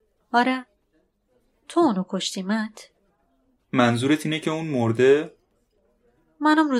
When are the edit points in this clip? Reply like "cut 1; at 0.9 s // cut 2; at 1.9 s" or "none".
cut 1; at 3.6 s